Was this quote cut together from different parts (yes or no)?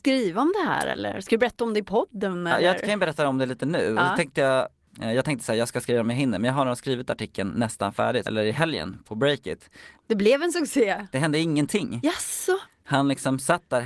yes